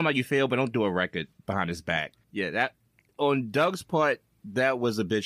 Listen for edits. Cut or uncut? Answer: cut